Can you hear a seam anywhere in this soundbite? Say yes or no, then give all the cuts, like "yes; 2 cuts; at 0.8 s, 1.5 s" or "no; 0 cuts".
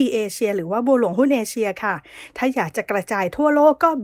no; 0 cuts